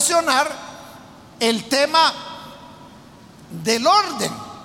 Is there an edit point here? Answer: no; 0 cuts

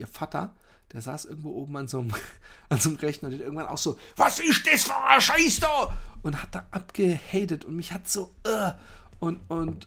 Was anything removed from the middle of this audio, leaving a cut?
no; 0 cuts

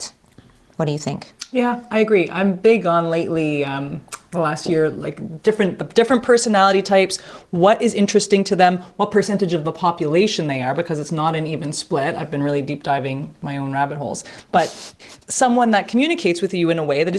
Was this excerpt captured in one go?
no; 1 cut; at 15.2 s

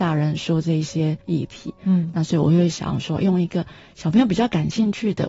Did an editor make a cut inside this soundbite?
no; 0 cuts

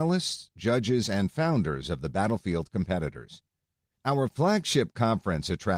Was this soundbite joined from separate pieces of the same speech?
yes; 1 cut; at 3.9 s

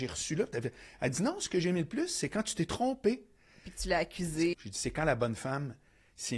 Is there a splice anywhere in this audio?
yes; 1 cut; at 4.5 s

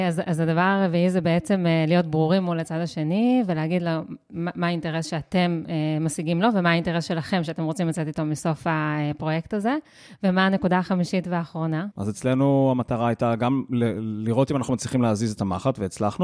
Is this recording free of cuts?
no; 1 cut; at 11.9 s

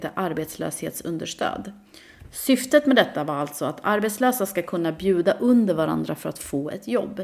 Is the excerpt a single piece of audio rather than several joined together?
yes; 0 cuts

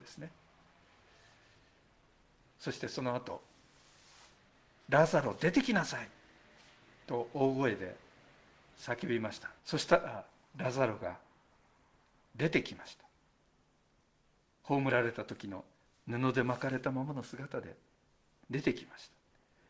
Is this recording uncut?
no; 1 cut; at 9.6 s

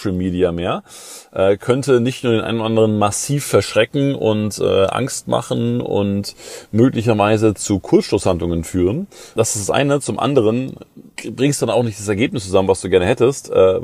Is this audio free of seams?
yes; 0 cuts

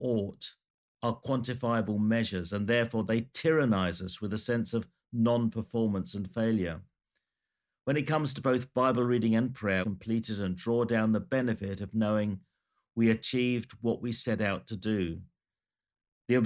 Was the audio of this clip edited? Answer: yes; 1 cut; at 9.8 s

